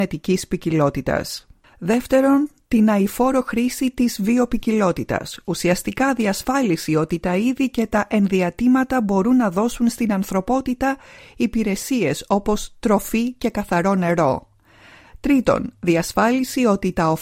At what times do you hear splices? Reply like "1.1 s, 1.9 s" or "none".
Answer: none